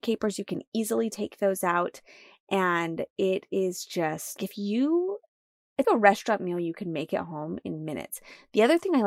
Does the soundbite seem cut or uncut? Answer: cut